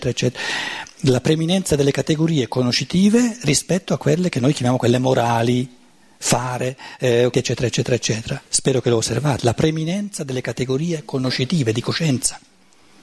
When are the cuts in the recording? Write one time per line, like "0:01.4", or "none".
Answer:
0:07.3
0:08.5